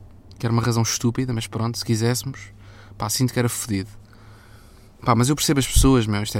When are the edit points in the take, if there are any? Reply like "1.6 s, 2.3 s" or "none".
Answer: none